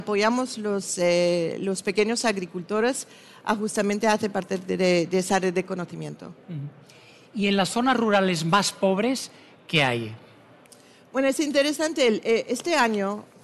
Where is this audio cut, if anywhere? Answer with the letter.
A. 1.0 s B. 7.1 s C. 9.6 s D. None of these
C